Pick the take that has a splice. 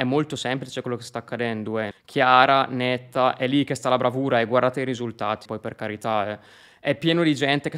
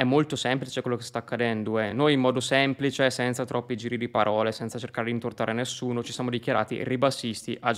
first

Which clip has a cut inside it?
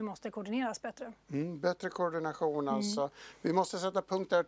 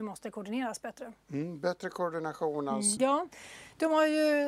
second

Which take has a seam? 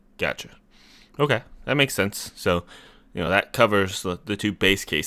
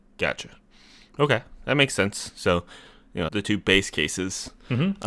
second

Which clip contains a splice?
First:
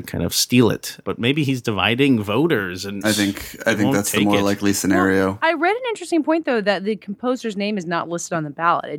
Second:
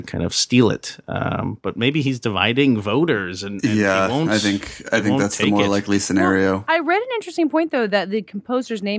first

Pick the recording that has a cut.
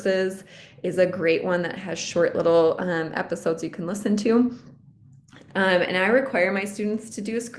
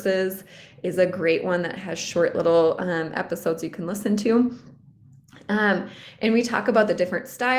first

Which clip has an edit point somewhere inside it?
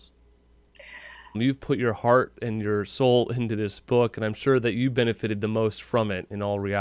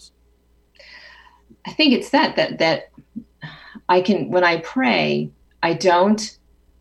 first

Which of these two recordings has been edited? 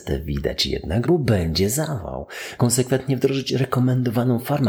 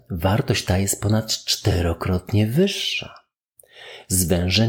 first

